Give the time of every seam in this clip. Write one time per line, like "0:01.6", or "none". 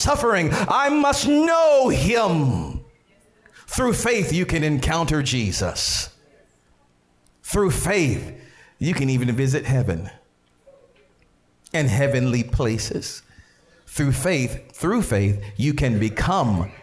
none